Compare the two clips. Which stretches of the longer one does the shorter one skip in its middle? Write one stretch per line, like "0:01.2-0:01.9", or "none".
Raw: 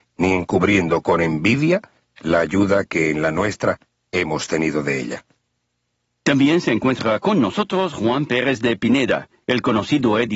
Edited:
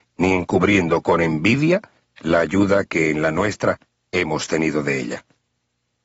none